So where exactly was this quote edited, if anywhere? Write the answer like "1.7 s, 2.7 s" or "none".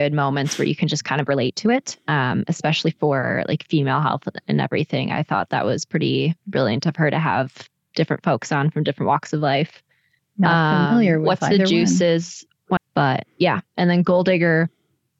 10.2 s, 12.8 s